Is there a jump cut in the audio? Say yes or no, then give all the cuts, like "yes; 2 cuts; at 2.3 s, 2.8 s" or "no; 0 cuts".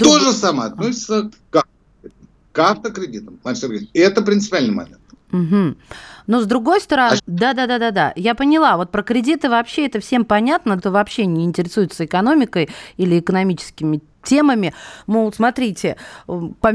yes; 3 cuts; at 7.2 s, 10.8 s, 15.0 s